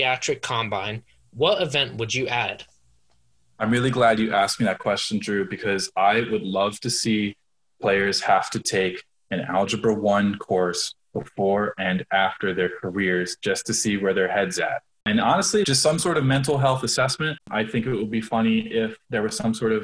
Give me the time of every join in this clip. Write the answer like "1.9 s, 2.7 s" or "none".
15.6 s, 17.4 s